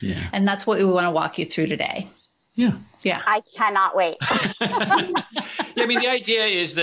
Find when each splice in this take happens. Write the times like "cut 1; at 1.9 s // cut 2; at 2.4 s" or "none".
none